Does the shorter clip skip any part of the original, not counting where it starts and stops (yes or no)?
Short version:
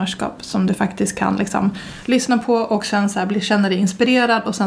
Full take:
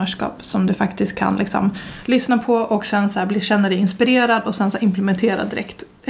no